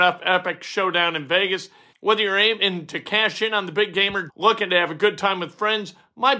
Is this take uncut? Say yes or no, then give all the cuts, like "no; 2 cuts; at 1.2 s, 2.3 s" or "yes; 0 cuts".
no; 2 cuts; at 1.9 s, 4.3 s